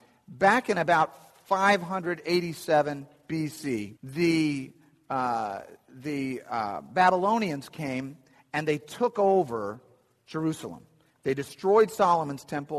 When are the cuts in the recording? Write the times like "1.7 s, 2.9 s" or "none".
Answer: 4.0 s